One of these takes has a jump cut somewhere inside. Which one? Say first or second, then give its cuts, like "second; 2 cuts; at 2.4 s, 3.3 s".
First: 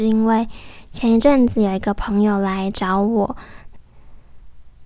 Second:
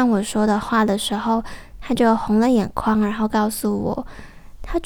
first; 1 cut; at 3.7 s